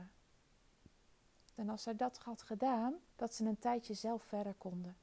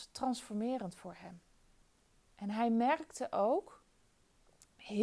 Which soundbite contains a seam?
first; 2 cuts; at 1.6 s, 3.1 s

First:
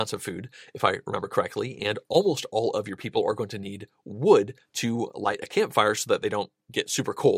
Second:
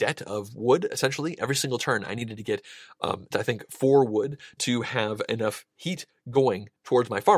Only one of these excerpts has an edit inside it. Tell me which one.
second; 2 cuts; at 3.3 s, 4.6 s

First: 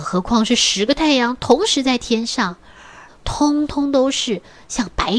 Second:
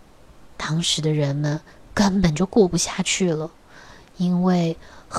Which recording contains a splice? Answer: first; 1 cut; at 3.1 s

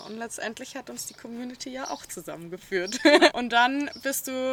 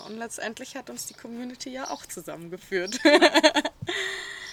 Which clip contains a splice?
first; 1 cut; at 3.3 s

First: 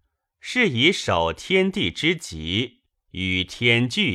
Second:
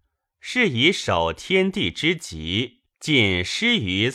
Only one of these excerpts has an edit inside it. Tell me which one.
second; 1 cut; at 2.9 s

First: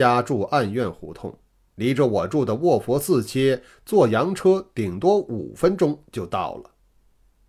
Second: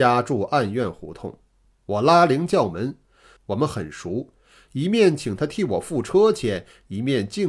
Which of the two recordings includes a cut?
second; 2 cuts; at 1.6 s, 3.4 s

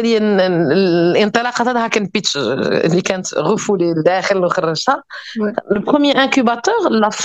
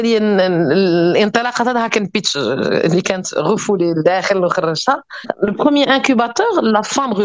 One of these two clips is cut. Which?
second; 1 cut; at 5.2 s

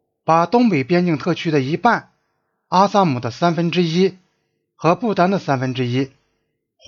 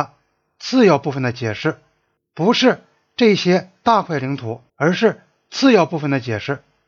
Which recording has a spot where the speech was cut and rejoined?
second; 2 cuts; at 2.2 s, 4.7 s

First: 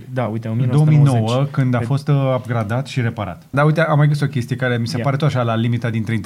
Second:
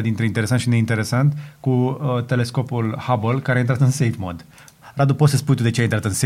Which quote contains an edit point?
first; 1 cut; at 3.5 s

